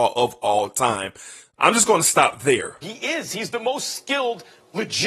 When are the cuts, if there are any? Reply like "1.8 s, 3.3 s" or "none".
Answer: 2.8 s